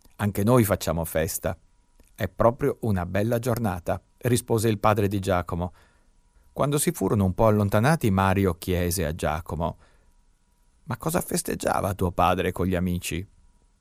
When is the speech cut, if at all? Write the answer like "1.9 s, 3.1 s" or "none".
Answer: 6.3 s